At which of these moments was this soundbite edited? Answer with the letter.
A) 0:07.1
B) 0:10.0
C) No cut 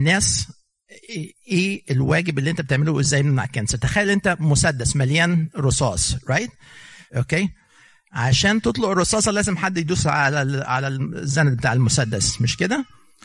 A